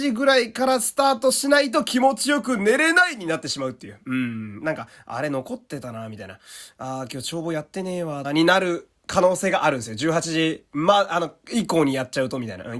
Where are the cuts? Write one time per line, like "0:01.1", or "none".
0:08.2